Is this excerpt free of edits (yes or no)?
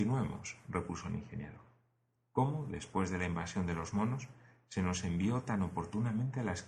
no